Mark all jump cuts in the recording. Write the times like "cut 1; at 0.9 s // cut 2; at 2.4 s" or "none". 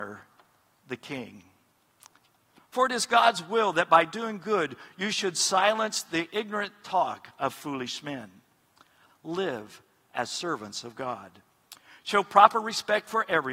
cut 1; at 2.6 s // cut 2; at 9.1 s